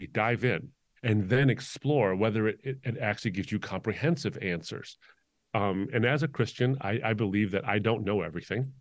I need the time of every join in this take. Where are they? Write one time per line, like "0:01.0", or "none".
none

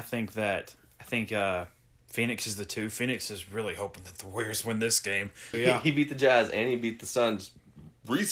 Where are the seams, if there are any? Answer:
0:05.5

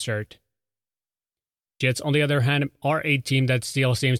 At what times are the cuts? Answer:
0:01.7

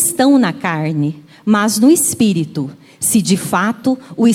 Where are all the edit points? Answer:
none

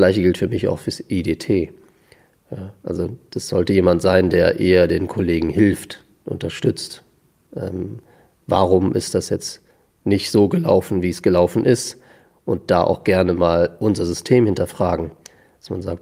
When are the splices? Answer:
none

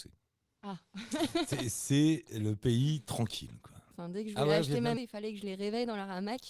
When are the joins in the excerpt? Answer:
0:03.9
0:05.0

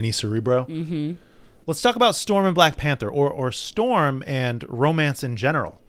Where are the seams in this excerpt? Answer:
none

